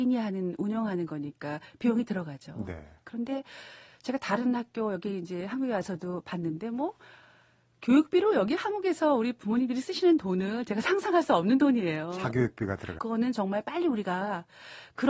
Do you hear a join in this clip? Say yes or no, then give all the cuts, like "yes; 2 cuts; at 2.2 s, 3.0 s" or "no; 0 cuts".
yes; 1 cut; at 13.0 s